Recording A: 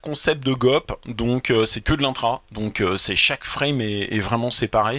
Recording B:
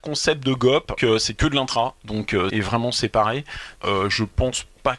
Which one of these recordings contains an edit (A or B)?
B